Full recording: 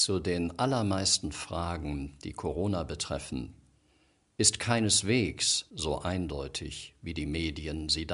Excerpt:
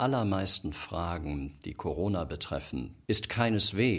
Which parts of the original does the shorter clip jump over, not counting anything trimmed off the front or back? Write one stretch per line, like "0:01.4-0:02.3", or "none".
0:03.6-0:04.3

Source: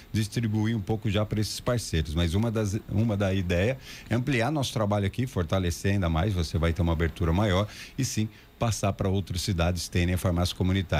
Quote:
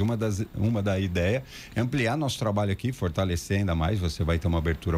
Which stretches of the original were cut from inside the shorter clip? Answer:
none

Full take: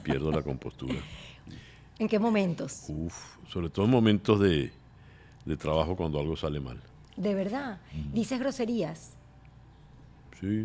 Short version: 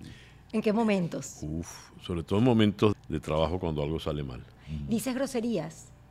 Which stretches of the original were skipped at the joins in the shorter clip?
0:04.4-0:05.3
0:06.9-0:07.8

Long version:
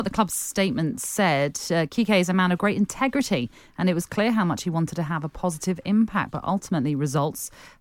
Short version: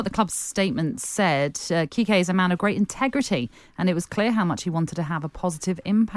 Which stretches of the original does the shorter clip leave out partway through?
none

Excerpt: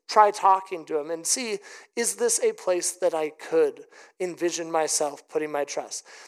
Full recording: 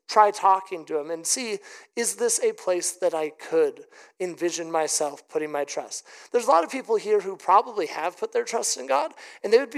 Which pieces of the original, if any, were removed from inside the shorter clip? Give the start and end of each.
none

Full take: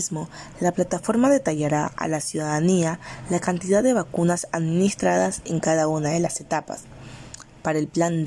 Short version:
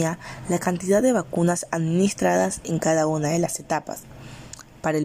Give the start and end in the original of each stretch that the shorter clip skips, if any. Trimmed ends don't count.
none

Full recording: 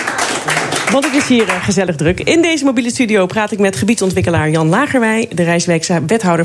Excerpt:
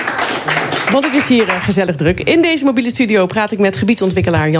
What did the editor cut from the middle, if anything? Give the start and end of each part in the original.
none

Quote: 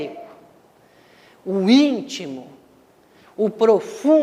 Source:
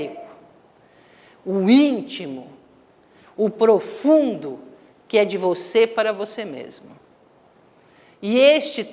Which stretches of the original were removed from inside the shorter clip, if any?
none

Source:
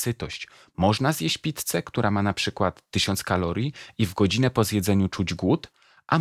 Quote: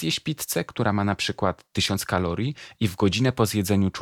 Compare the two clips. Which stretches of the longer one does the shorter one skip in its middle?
none

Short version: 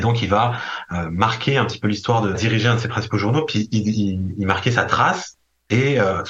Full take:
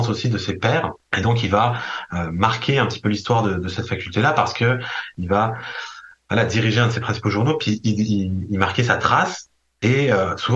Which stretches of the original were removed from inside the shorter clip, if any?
0:03.6-0:06.5

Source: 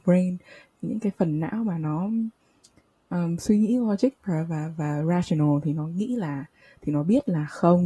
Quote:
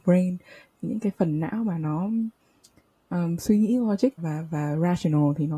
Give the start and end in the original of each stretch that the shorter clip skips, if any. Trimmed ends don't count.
0:04.2-0:04.4

